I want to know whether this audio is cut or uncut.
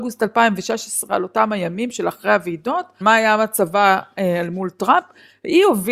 cut